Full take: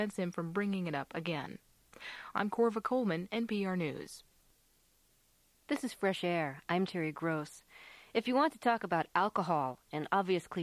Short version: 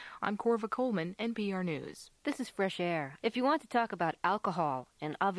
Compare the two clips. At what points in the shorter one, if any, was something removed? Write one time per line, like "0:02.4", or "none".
0:02.2
0:03.2